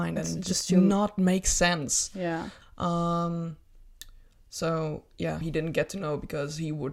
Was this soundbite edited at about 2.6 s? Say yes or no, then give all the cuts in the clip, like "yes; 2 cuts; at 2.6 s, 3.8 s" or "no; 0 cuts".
yes; 2 cuts; at 2.6 s, 5.4 s